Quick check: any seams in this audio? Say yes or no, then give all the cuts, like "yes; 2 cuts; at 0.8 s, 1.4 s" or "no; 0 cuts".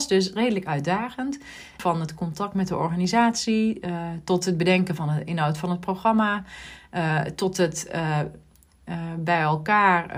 yes; 1 cut; at 1.8 s